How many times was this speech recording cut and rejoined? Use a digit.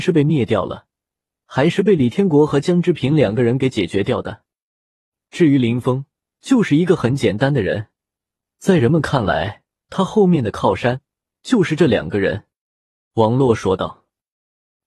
1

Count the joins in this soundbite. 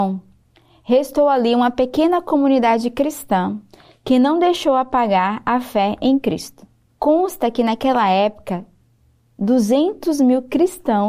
1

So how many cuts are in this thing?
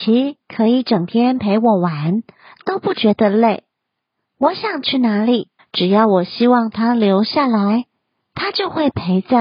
1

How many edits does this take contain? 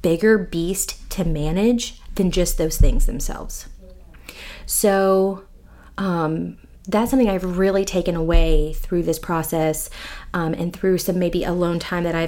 0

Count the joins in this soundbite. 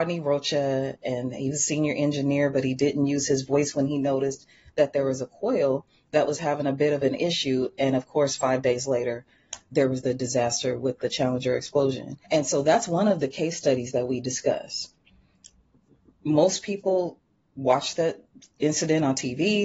2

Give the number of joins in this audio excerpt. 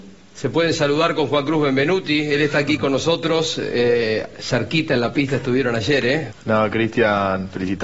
1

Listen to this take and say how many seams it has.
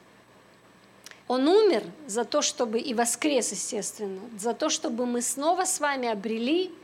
1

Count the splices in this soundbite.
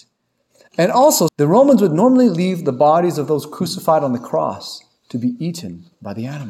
1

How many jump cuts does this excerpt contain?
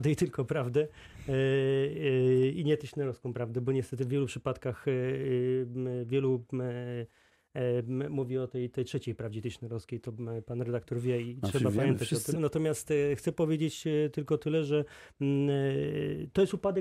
1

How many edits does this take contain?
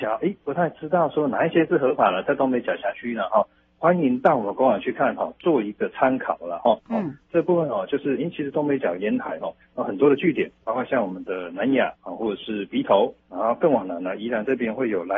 3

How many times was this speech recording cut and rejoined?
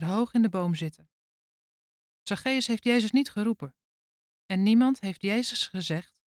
0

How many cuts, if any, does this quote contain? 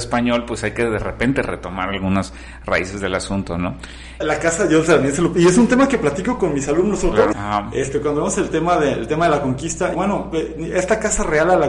3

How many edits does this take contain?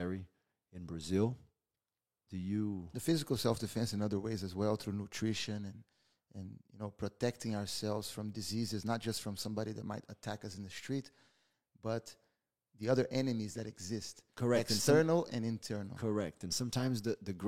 1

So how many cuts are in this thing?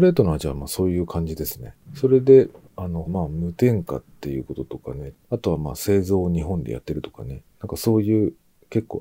3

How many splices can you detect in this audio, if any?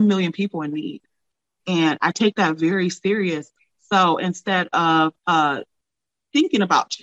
1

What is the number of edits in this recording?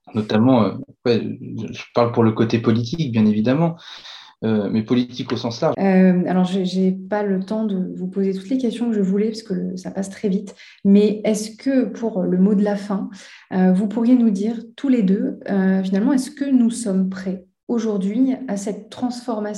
1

